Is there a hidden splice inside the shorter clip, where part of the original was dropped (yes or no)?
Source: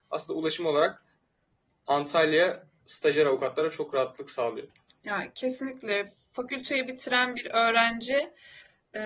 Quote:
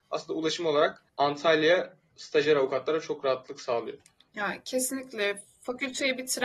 yes